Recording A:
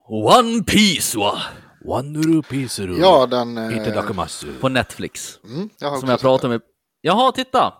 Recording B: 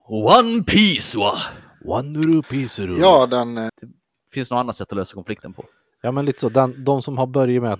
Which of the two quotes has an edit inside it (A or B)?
B